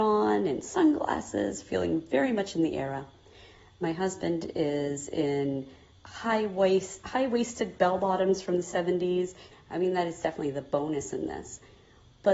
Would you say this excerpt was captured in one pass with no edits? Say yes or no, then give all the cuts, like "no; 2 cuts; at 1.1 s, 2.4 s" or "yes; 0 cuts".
no; 1 cut; at 9.5 s